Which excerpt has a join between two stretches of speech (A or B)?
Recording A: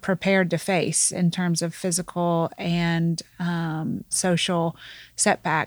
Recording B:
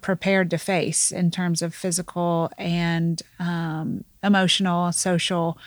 A